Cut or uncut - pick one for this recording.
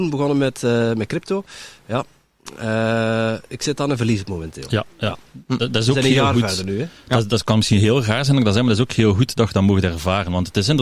uncut